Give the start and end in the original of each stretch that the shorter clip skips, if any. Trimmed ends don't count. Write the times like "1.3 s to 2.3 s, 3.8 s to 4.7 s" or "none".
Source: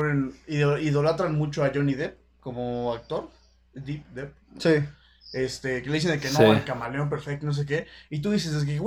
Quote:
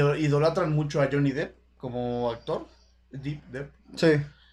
none